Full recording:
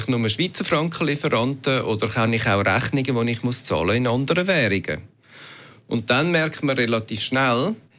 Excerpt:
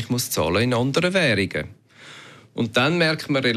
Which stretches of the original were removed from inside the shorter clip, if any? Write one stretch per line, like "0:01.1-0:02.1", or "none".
none